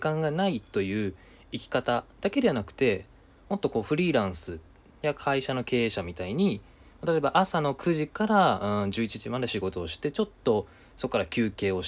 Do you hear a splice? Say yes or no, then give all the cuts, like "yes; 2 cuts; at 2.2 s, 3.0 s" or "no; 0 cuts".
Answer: no; 0 cuts